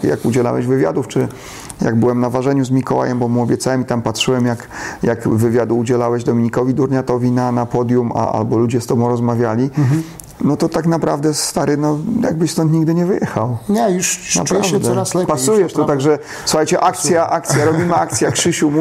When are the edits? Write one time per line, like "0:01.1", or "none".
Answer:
none